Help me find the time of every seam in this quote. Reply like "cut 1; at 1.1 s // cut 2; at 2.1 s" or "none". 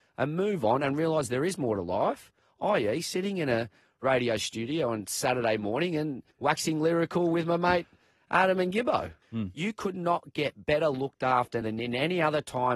cut 1; at 6.3 s // cut 2; at 9.2 s // cut 3; at 11.6 s